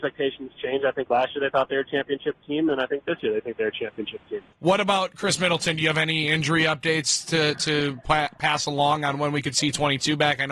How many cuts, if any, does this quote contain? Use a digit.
1